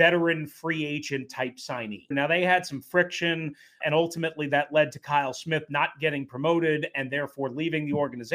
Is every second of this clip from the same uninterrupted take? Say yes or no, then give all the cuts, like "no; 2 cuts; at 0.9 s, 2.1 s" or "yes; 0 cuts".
no; 2 cuts; at 2.1 s, 3.8 s